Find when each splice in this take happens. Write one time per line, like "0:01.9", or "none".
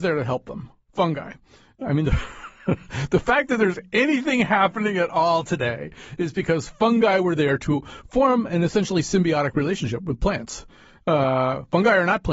none